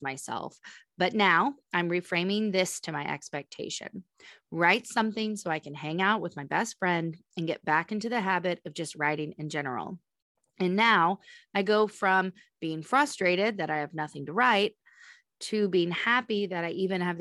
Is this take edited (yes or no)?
no